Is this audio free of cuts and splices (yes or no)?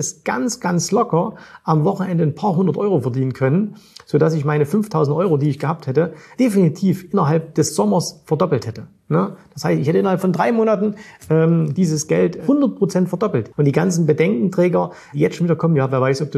no